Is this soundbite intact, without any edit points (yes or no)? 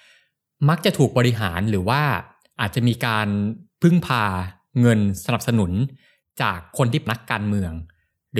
no